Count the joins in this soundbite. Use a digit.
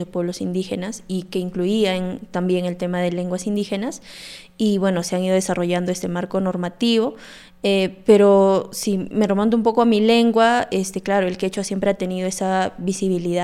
0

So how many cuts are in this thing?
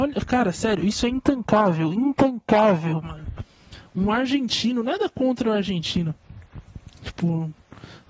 0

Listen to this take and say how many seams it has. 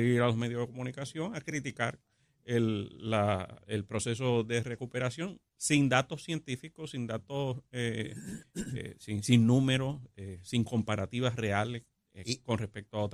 0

